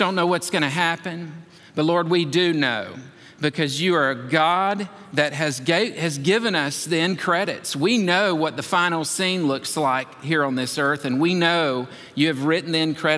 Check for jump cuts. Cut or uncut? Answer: uncut